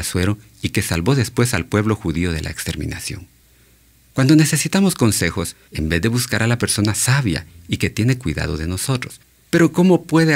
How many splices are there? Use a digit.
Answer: 1